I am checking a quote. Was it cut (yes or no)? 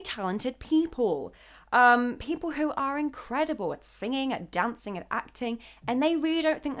no